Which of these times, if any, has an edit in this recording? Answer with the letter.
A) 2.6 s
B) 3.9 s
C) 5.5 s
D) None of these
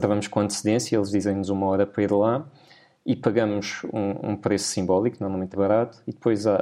C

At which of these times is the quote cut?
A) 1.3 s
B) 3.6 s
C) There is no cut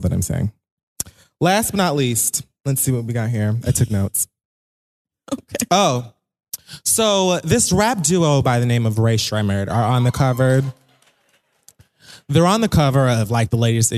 C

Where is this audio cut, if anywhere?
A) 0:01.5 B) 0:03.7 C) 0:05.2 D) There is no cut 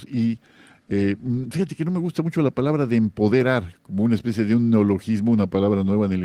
B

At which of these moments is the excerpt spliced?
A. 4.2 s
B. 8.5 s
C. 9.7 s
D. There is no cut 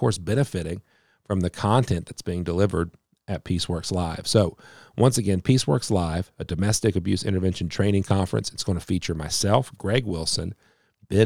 D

